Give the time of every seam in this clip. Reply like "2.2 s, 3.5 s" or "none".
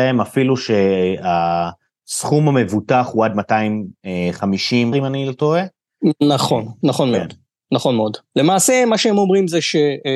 4.9 s